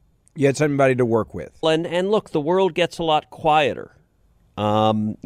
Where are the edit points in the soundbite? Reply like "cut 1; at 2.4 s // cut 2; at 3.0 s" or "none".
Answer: cut 1; at 1.6 s